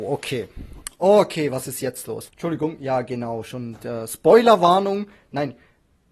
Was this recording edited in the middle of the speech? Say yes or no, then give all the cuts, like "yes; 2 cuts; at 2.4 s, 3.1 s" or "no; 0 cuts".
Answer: yes; 1 cut; at 2.3 s